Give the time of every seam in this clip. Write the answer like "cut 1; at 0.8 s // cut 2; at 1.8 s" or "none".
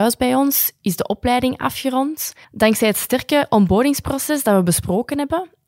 cut 1; at 2.4 s